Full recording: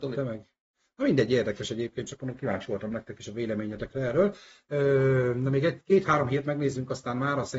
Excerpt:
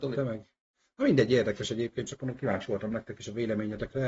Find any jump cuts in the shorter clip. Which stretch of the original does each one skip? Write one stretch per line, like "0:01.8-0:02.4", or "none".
none